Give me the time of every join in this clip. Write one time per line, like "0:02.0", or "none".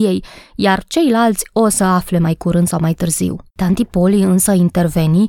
0:03.5